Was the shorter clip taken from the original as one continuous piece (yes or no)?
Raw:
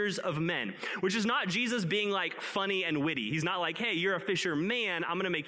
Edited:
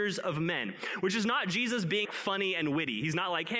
no